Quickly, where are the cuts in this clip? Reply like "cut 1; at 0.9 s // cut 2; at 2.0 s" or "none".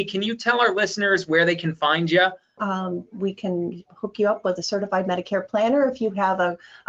cut 1; at 2.6 s